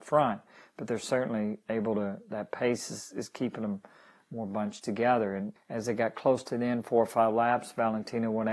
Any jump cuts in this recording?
yes; 1 cut; at 5.6 s

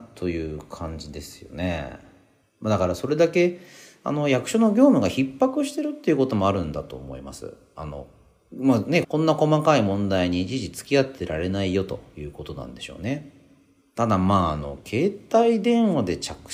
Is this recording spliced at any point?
yes; 1 cut; at 9.0 s

